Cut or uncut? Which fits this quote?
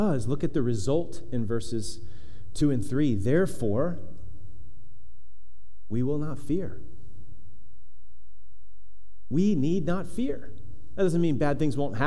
uncut